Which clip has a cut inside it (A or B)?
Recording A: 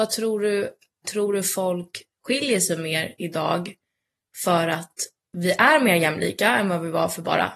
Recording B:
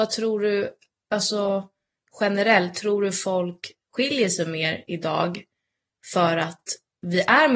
A